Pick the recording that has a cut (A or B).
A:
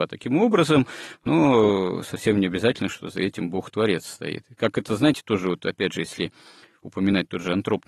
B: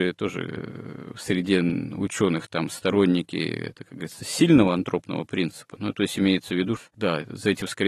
B